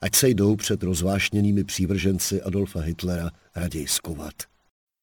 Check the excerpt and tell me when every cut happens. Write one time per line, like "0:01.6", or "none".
none